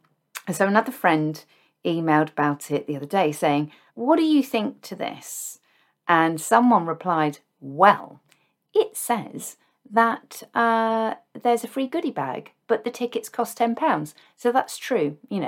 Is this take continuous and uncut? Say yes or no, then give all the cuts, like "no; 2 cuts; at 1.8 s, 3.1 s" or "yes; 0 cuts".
no; 1 cut; at 3.9 s